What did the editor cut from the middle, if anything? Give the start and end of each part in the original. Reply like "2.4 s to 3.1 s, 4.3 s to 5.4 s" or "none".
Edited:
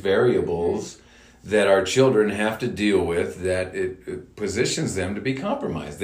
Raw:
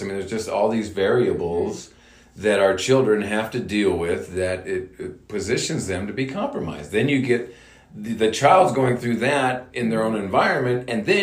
none